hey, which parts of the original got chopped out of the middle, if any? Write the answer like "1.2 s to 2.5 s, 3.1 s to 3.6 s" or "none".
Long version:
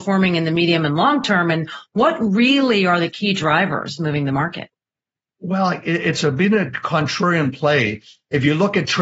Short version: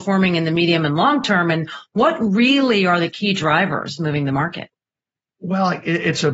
none